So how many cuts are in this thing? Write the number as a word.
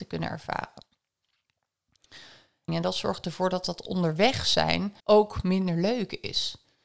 two